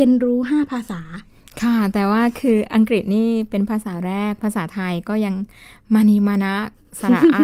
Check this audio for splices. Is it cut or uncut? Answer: uncut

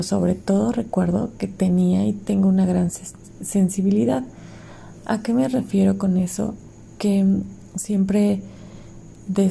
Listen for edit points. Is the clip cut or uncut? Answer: uncut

